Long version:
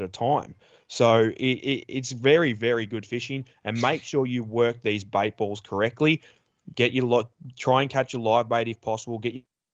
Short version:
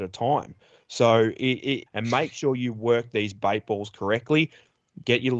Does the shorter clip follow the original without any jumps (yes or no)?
no